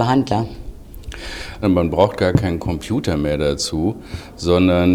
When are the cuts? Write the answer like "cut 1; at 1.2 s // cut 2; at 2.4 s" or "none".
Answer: cut 1; at 1.6 s